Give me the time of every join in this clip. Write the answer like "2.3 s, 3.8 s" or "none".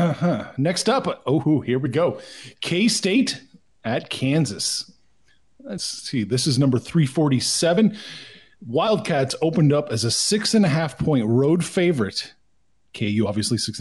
1.4 s